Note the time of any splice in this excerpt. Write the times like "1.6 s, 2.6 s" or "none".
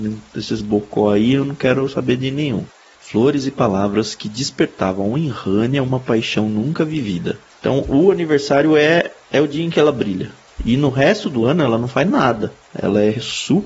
2.9 s, 7.5 s

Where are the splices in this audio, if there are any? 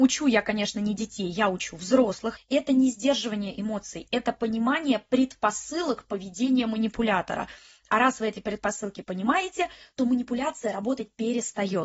2.4 s

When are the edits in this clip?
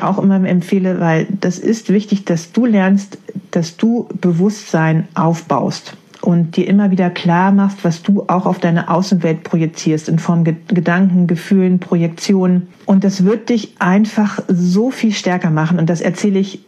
none

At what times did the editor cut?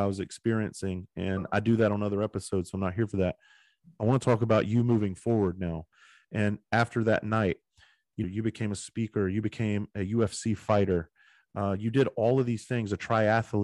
8.2 s

